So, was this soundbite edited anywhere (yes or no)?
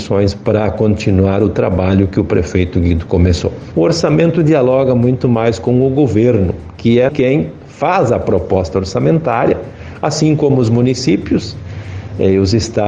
yes